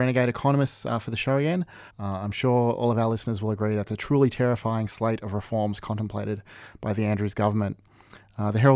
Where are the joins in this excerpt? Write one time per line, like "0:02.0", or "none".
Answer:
0:01.9